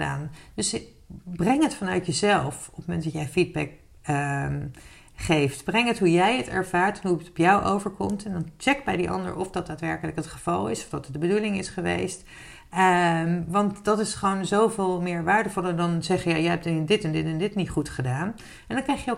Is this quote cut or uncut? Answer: uncut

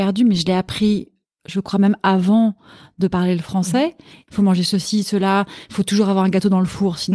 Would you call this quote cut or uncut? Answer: cut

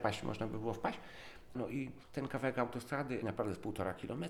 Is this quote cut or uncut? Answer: cut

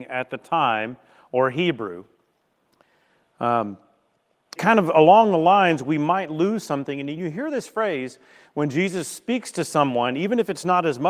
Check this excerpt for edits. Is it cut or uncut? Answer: cut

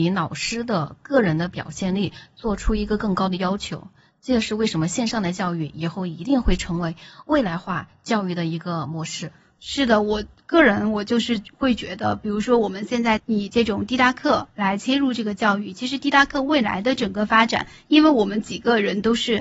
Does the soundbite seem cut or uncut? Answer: uncut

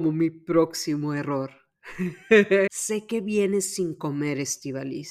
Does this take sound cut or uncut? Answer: cut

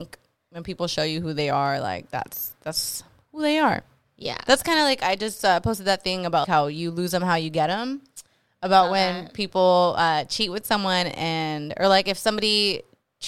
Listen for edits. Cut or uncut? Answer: cut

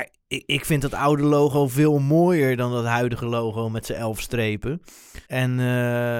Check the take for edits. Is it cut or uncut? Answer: cut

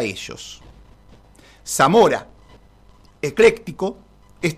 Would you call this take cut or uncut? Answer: uncut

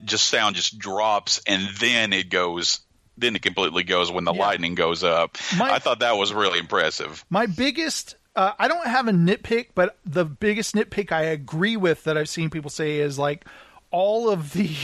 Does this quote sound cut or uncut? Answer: uncut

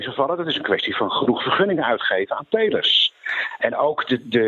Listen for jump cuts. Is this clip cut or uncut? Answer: cut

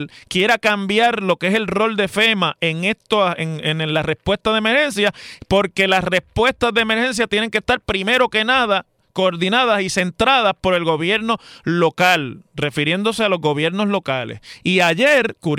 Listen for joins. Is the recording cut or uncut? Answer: cut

